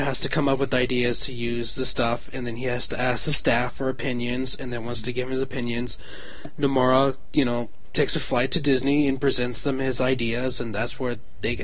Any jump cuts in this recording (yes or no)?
no